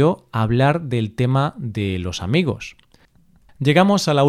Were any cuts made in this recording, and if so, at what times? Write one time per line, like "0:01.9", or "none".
0:03.1